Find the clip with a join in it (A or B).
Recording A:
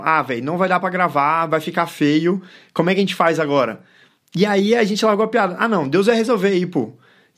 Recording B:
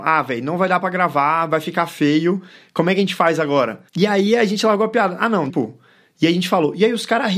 B